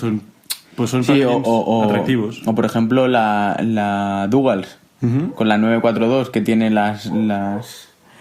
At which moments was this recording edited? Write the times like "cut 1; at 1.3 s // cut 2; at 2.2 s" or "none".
none